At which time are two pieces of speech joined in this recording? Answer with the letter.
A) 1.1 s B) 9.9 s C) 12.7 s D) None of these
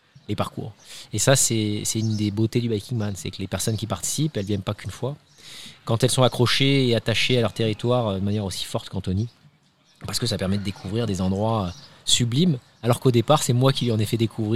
D